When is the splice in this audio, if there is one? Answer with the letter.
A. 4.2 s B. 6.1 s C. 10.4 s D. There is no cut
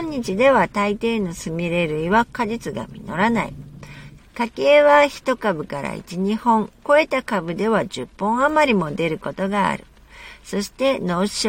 A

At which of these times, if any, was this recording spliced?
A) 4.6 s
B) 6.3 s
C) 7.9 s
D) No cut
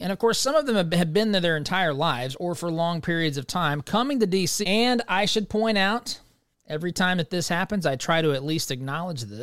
A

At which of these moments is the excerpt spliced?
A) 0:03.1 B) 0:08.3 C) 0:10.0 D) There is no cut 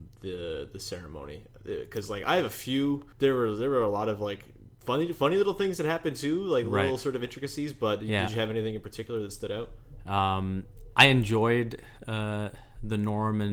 A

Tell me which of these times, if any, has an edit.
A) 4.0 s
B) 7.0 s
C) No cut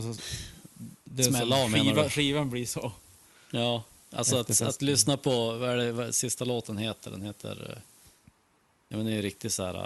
C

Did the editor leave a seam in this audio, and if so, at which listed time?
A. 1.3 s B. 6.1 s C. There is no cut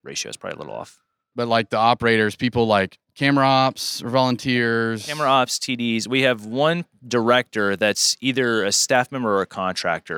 A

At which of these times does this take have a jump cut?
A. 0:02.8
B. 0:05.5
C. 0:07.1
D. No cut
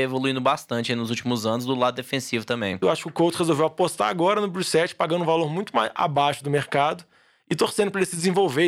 A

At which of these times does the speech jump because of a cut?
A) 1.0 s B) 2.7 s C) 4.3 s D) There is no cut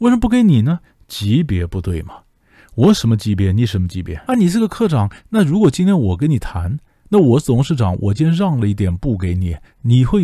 C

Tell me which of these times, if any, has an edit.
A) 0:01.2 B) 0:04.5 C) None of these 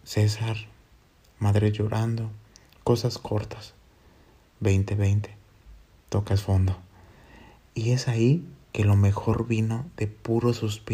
A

